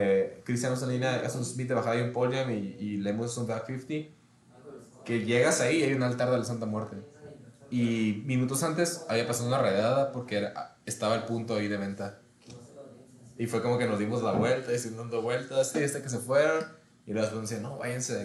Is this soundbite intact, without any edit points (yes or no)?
no